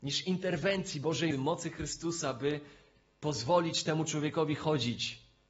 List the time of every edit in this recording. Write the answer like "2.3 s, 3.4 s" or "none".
1.3 s